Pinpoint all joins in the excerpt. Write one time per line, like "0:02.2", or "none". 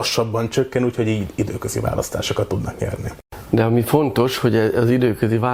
none